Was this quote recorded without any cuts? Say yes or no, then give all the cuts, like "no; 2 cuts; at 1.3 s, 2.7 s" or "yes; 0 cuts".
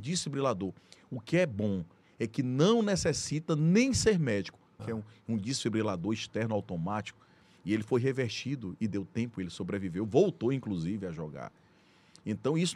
no; 1 cut; at 4.8 s